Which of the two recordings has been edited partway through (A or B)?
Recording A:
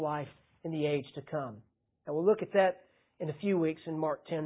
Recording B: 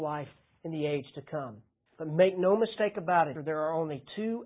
B